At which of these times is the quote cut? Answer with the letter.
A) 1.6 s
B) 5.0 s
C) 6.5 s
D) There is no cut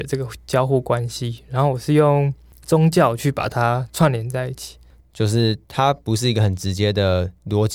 B